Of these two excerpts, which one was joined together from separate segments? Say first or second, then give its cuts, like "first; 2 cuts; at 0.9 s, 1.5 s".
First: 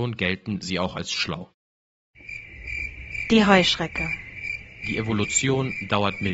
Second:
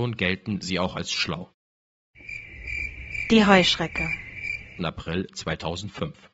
second; 1 cut; at 4.8 s